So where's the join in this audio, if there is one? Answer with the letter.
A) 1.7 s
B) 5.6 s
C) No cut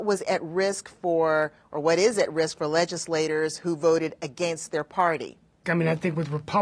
B